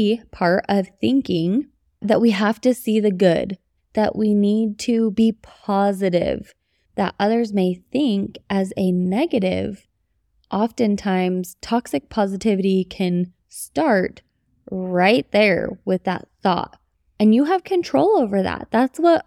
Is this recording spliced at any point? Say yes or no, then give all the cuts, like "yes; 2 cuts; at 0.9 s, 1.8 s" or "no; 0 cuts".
yes; 1 cut; at 3.8 s